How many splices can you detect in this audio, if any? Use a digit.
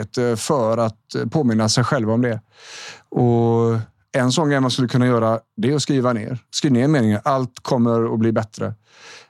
1